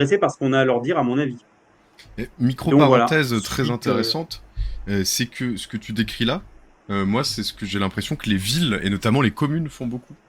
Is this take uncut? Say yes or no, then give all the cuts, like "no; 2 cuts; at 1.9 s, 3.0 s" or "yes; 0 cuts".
yes; 0 cuts